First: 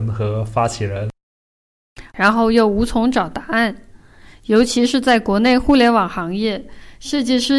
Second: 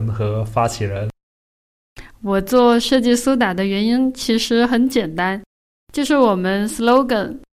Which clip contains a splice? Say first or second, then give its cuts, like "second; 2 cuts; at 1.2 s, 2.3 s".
first; 1 cut; at 2.1 s